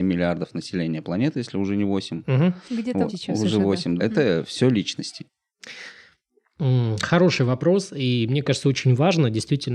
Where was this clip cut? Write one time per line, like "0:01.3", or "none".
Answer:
0:03.1

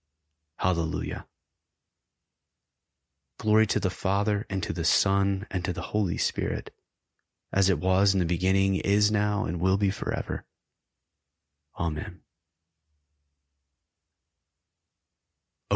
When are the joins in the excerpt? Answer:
none

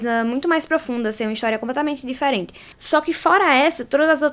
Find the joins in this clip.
0:02.7

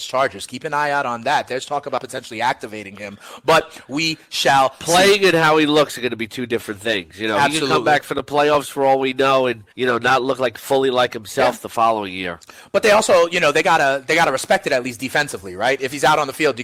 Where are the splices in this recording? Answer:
0:09.7

